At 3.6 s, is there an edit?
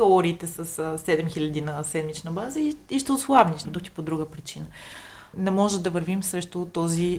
yes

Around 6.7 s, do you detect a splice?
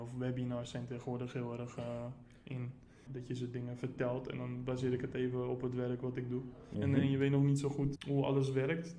yes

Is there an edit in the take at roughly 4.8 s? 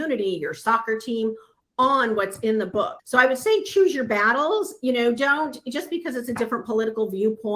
no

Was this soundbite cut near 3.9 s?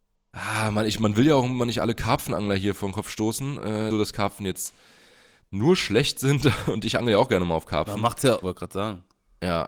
yes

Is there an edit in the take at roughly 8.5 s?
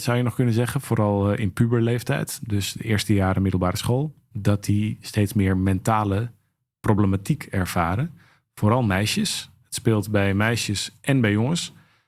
no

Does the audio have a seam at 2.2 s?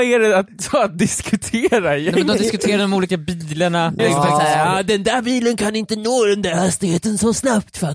no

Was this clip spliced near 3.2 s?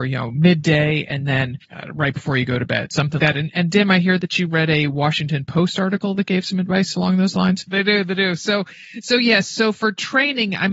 yes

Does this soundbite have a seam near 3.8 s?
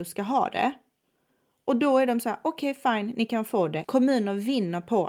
yes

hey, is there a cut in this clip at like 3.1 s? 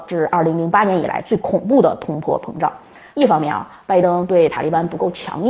yes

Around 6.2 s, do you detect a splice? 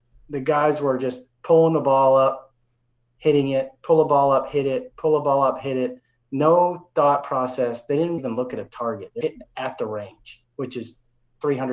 no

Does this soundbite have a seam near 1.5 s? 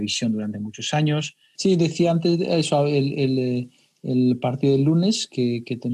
yes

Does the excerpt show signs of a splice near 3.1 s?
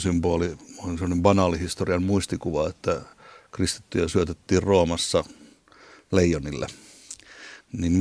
no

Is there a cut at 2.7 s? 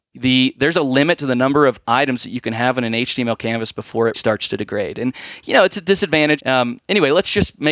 no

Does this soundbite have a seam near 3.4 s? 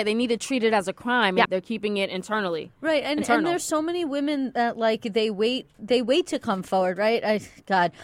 no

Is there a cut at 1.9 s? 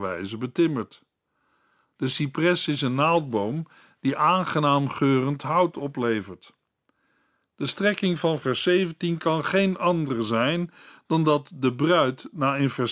no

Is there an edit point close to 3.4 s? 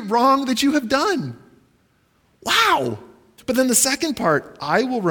yes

